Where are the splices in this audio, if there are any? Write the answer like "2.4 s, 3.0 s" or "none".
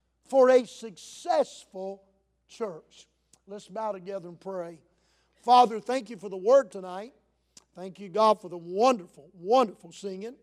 none

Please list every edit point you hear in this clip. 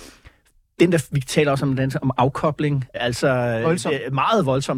2.9 s

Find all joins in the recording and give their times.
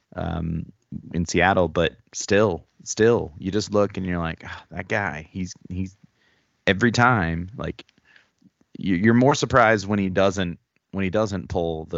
none

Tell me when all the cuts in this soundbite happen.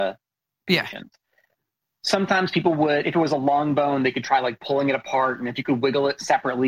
none

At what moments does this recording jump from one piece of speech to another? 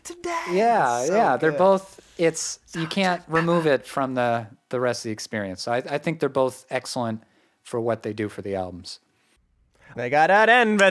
9.9 s

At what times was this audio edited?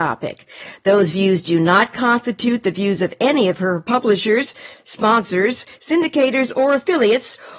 none

